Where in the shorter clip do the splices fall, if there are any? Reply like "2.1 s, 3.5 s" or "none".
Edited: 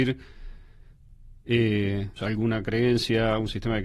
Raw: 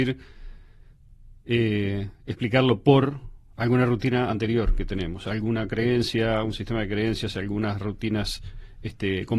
2.2 s